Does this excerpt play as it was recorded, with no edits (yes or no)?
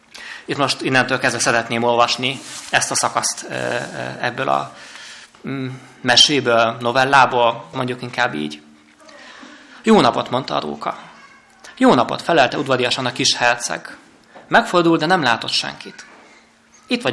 no